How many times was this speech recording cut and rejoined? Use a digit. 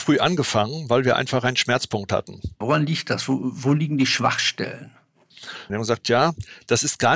2